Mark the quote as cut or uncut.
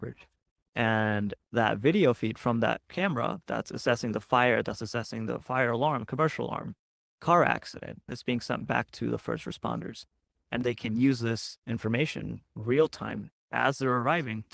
cut